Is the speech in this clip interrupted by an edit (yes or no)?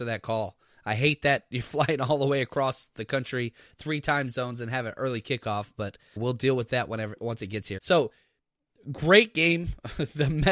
yes